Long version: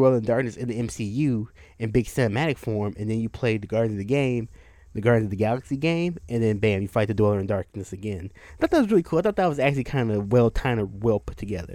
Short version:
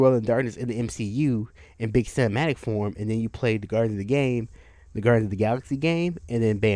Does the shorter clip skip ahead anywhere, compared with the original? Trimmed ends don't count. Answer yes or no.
no